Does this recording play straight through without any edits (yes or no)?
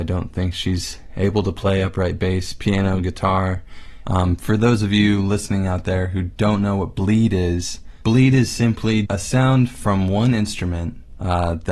no